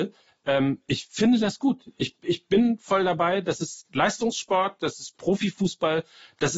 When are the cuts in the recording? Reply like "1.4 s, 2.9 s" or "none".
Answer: 3.9 s